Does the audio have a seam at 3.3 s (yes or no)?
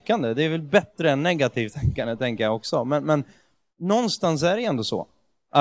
no